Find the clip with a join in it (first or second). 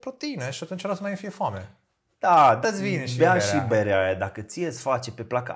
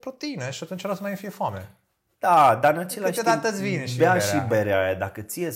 first